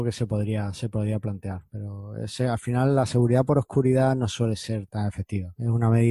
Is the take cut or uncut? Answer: cut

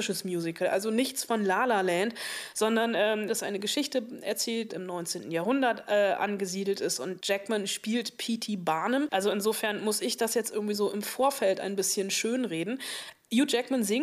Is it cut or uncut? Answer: cut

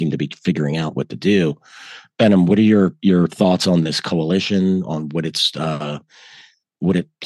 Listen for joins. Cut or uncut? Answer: cut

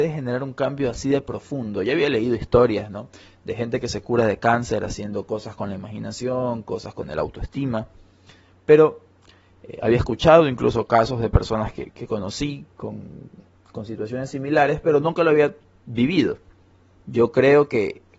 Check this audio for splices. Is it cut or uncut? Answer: cut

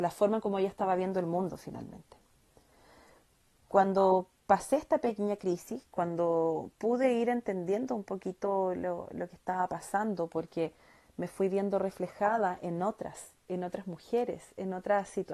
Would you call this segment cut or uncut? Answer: uncut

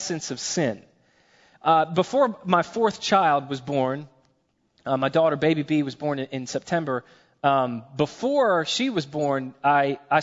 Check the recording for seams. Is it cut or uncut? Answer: uncut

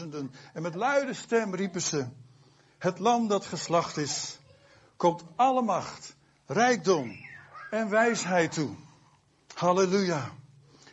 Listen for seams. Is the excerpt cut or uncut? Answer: uncut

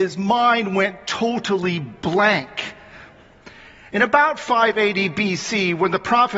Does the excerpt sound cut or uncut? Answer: cut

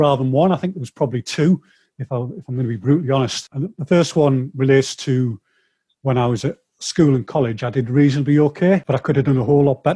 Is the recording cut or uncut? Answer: uncut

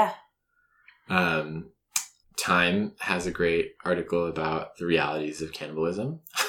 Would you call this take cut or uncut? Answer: cut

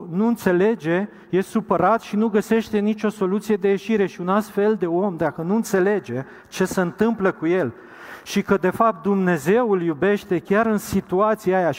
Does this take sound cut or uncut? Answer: uncut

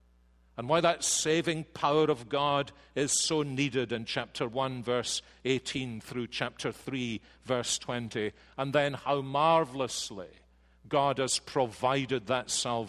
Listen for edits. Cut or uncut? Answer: uncut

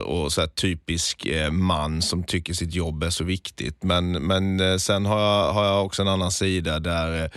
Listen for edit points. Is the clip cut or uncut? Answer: uncut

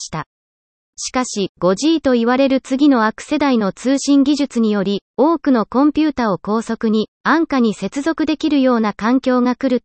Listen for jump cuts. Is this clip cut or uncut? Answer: uncut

